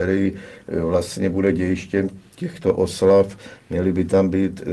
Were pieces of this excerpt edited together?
no; 0 cuts

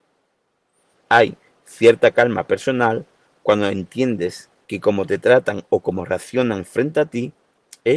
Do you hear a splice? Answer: no; 0 cuts

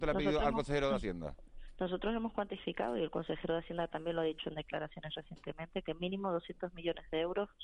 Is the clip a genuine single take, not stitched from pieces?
yes; 0 cuts

